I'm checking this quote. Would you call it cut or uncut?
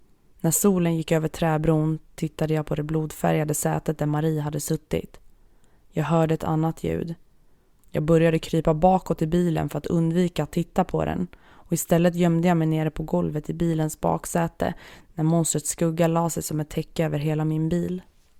cut